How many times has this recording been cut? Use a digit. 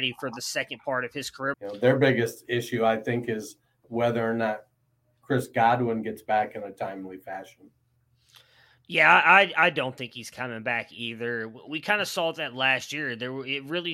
1